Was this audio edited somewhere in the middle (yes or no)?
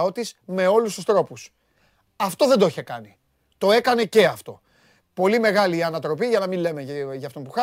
no